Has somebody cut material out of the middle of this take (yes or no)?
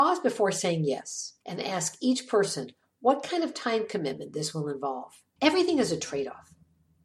yes